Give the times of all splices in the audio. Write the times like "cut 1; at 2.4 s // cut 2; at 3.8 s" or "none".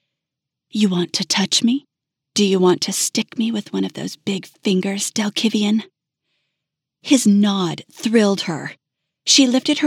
none